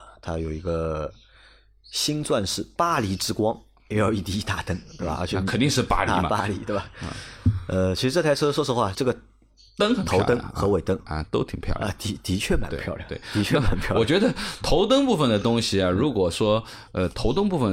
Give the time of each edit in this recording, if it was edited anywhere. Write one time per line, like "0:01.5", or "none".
0:08.9